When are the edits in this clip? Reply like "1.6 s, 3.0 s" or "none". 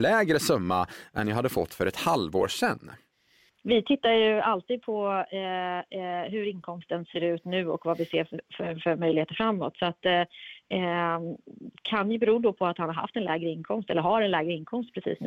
3.6 s